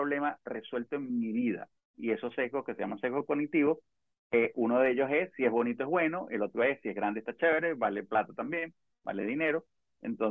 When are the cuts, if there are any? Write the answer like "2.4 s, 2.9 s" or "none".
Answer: 1.8 s